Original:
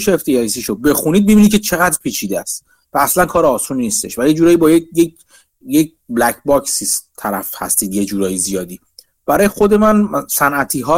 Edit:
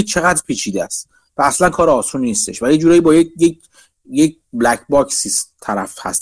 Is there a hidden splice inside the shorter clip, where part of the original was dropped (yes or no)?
no